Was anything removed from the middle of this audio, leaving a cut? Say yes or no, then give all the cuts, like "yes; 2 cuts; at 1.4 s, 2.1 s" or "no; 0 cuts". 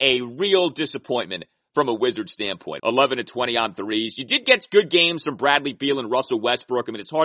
yes; 1 cut; at 2.8 s